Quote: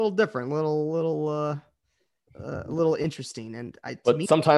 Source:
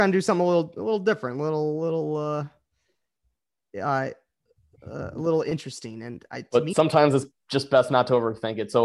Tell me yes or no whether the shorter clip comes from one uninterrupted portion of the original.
no